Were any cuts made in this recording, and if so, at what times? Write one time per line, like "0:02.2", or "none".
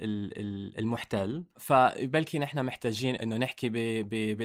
0:03.2